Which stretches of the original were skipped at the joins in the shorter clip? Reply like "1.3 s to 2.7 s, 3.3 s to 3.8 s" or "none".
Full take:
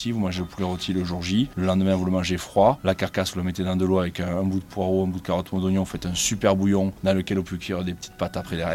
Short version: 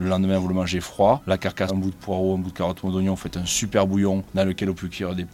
3.2 s to 4.4 s